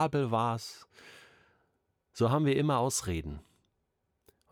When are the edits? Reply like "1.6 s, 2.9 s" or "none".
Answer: none